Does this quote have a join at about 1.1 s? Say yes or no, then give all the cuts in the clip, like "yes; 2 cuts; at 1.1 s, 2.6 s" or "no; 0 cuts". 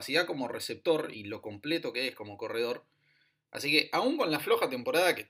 yes; 1 cut; at 1.1 s